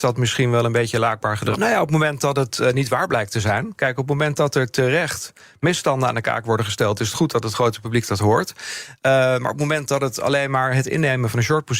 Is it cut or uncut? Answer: cut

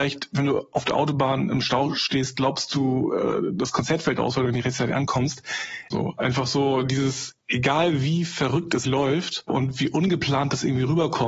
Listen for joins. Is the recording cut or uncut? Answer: cut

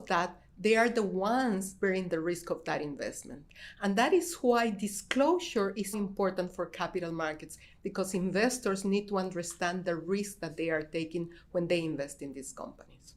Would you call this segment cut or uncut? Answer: cut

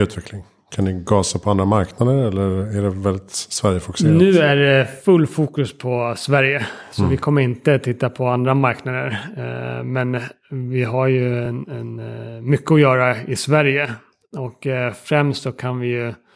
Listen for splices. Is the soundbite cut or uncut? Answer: uncut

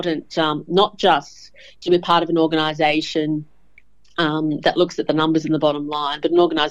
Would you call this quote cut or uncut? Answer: uncut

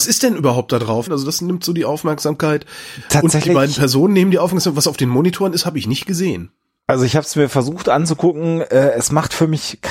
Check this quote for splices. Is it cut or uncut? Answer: cut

